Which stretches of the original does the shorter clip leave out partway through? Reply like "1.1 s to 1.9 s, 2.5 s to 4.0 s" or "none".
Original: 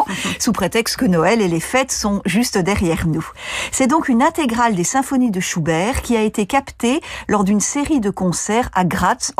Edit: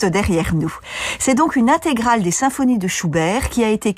none